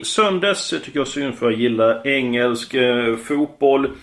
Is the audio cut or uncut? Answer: uncut